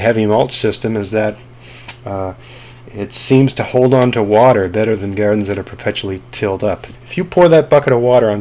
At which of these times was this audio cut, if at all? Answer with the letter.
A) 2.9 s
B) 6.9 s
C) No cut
B